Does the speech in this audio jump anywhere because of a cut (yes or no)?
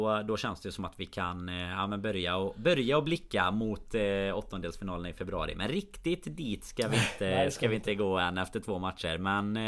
no